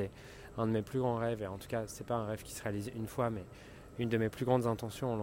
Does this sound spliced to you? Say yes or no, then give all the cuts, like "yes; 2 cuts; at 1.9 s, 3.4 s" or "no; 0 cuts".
no; 0 cuts